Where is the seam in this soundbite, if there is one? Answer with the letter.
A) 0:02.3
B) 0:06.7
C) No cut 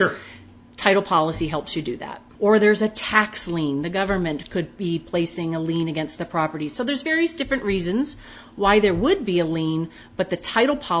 A